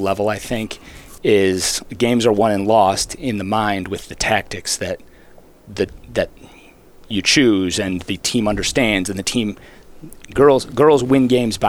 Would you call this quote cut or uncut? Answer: uncut